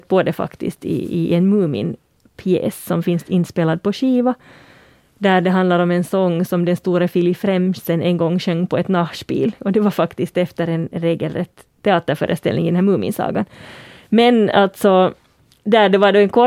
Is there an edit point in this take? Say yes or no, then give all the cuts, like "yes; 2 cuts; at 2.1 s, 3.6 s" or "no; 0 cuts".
no; 0 cuts